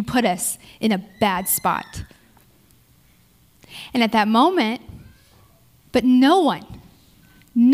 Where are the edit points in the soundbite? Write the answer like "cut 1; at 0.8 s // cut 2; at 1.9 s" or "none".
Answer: cut 1; at 5.9 s